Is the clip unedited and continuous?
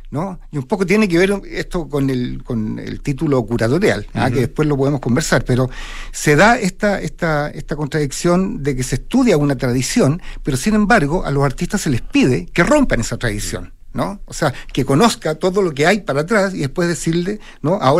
no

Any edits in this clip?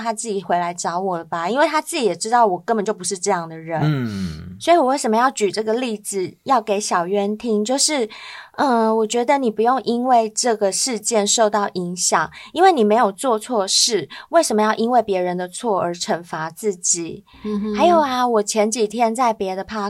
no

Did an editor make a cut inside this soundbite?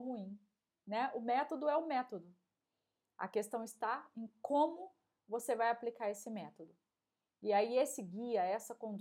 no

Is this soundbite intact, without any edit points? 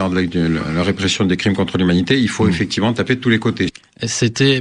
yes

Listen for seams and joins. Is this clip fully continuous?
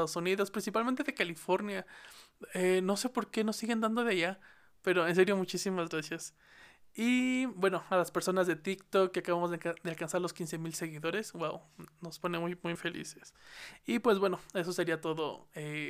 no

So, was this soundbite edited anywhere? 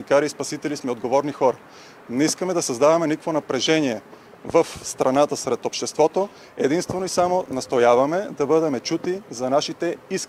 no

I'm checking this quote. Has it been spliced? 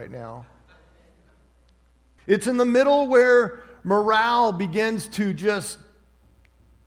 yes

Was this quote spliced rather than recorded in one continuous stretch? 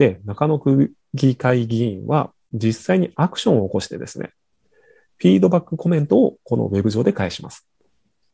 no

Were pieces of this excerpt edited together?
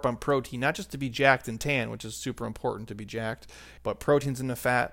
yes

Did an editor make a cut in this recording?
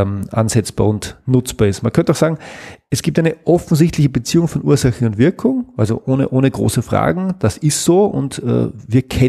no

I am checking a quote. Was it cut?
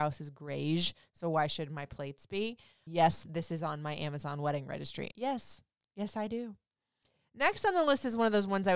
yes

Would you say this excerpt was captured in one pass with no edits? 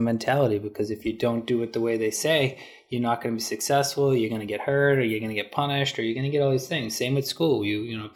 yes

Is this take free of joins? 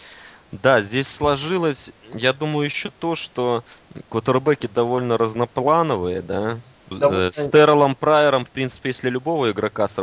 no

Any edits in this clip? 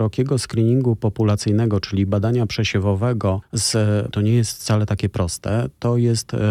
yes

